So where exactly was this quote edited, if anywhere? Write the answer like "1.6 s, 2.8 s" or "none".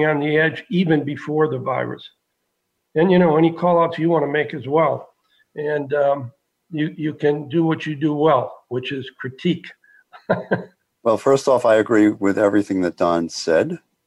none